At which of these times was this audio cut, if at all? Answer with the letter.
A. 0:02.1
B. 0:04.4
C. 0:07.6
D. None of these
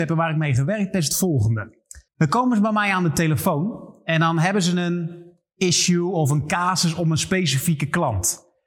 A